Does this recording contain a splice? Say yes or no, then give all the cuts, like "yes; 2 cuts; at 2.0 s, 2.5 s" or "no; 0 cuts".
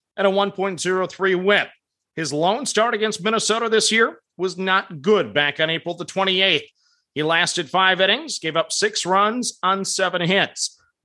no; 0 cuts